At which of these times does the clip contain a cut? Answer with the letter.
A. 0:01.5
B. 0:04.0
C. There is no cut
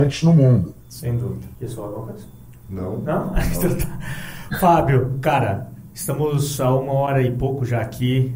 A